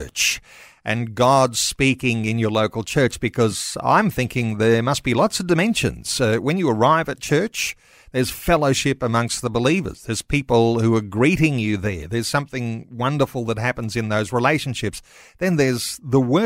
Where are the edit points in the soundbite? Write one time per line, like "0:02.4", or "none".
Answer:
none

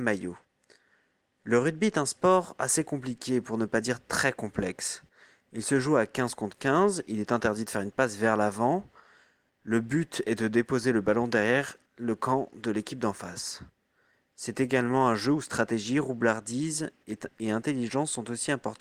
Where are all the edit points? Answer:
none

